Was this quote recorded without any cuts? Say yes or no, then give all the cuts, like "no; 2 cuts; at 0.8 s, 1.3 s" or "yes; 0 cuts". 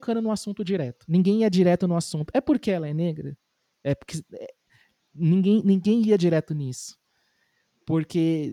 yes; 0 cuts